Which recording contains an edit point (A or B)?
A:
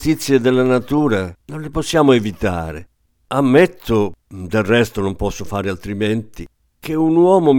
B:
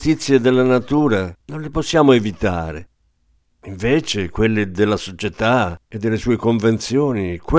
A